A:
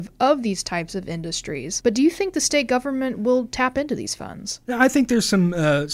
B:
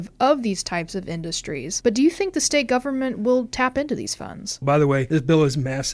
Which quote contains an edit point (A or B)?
B